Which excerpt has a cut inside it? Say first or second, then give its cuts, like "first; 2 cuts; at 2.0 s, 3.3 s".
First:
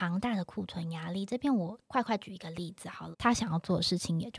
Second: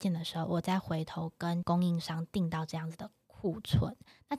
first; 1 cut; at 3.1 s